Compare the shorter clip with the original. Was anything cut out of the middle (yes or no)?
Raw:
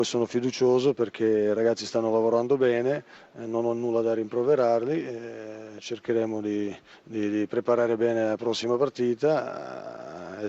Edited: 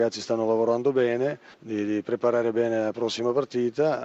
yes